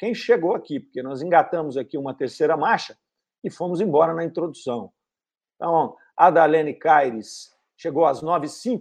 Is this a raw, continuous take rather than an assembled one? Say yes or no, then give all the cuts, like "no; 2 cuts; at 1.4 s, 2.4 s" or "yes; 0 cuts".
yes; 0 cuts